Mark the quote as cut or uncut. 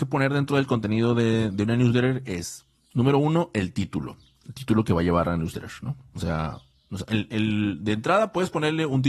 uncut